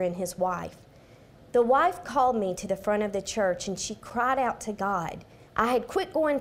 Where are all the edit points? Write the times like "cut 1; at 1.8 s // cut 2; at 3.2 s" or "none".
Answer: cut 1; at 5.5 s